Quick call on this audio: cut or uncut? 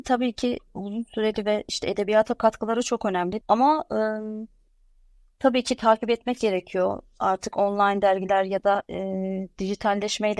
cut